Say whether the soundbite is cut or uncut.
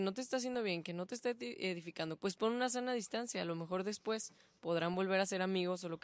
cut